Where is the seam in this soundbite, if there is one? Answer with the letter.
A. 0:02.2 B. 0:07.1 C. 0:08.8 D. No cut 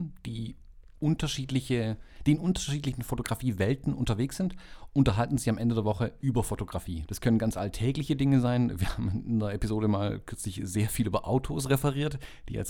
B